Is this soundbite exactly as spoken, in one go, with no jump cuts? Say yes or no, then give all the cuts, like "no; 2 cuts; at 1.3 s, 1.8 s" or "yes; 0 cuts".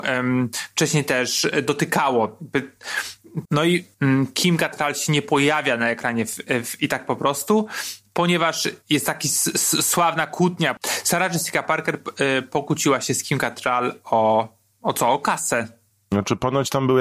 no; 1 cut; at 3.4 s